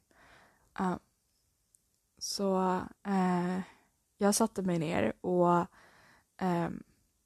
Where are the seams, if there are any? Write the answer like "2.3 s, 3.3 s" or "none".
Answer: 3.0 s